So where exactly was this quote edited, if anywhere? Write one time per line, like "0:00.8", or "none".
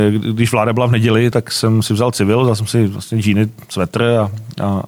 0:01.3